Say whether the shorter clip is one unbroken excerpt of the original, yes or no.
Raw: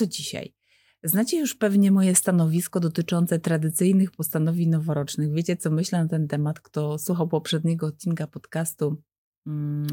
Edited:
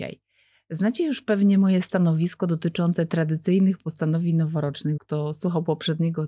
no